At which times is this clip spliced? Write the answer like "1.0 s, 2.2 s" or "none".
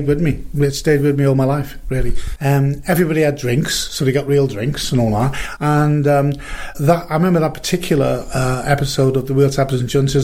2.4 s, 5.6 s, 6.7 s